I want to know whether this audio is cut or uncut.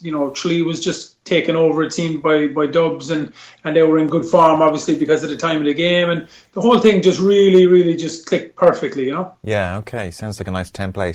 uncut